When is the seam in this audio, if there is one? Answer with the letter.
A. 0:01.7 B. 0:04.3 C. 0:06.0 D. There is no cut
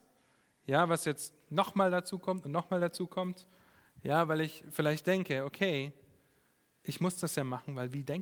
D